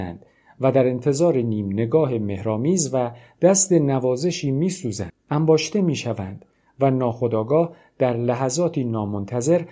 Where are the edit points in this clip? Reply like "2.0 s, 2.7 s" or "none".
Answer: 5.1 s